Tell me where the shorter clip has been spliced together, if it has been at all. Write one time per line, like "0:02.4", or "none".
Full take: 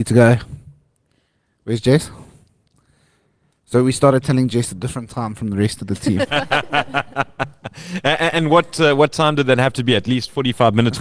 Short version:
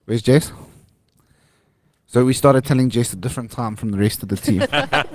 none